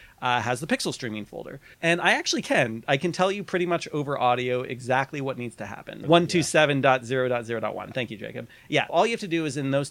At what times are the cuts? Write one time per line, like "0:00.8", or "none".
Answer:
0:01.7
0:06.0
0:08.9